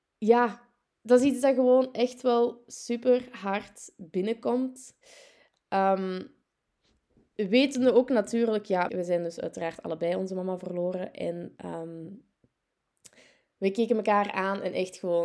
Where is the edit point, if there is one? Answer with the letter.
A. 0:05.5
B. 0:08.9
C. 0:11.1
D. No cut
B